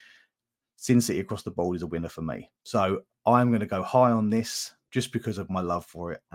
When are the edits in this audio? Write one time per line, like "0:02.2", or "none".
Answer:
none